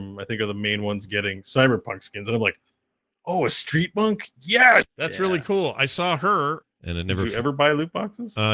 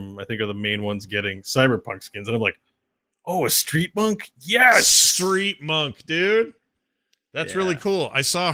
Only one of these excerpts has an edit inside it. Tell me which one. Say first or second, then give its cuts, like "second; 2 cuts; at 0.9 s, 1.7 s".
first; 2 cuts; at 4.8 s, 6.6 s